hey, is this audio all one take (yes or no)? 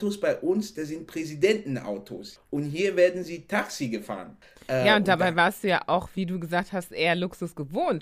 yes